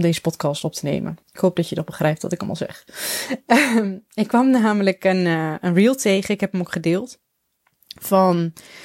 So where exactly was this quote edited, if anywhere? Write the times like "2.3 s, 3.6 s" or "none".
1.2 s